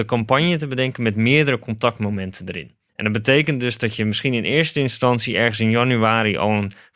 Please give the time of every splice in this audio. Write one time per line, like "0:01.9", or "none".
0:02.9